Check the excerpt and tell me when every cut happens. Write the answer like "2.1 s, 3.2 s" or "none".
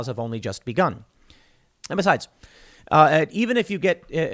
1.7 s